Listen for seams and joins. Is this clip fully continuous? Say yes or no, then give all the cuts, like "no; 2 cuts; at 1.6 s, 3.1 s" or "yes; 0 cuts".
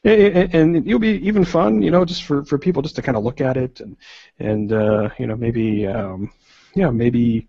yes; 0 cuts